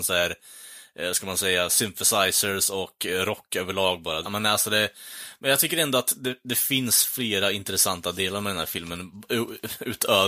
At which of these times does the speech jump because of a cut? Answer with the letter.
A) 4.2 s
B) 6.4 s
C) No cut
A